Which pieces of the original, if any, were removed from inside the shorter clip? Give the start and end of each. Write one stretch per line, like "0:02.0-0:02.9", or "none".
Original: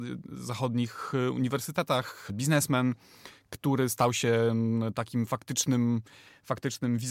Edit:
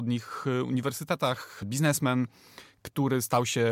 none